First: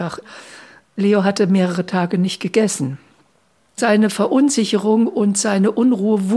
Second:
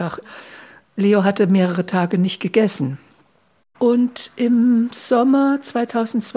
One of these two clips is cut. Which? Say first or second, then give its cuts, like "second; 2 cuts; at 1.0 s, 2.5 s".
second; 1 cut; at 3.6 s